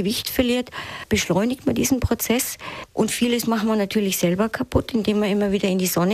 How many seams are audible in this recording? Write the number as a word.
one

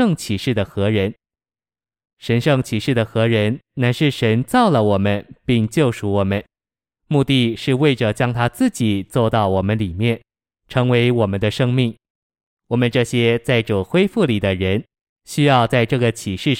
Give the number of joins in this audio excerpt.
zero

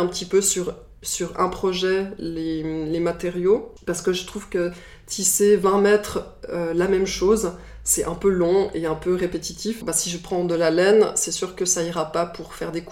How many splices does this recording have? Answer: one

